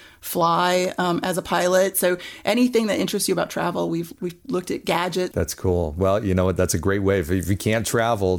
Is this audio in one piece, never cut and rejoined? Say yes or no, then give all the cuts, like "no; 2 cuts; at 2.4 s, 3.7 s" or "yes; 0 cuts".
no; 1 cut; at 5.3 s